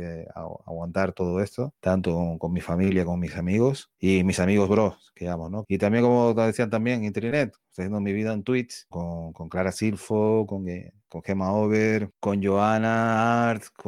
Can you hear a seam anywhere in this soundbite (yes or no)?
yes